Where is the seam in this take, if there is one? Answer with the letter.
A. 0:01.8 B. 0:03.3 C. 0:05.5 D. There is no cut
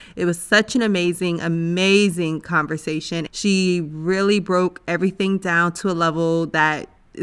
B